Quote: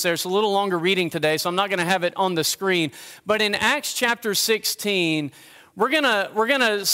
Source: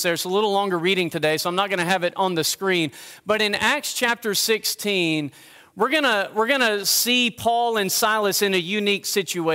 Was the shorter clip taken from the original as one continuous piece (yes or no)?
yes